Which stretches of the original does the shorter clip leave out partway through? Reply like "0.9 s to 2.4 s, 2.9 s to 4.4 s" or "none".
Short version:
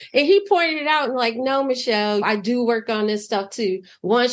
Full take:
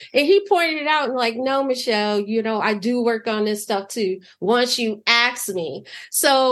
2.2 s to 2.6 s